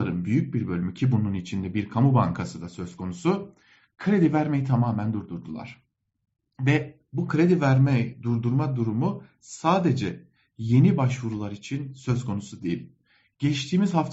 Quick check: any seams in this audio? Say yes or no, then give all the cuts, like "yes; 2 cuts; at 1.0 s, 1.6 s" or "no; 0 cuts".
no; 0 cuts